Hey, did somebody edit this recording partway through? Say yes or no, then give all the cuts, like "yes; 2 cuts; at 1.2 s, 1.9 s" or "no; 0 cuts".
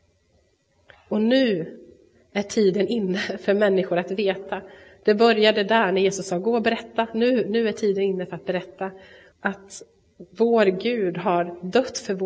yes; 1 cut; at 9.3 s